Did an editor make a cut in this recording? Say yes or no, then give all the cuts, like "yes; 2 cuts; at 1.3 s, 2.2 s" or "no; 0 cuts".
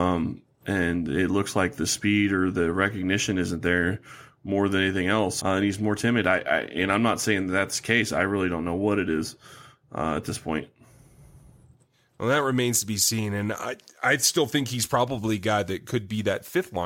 yes; 1 cut; at 5.4 s